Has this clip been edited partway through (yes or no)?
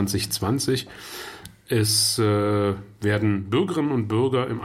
no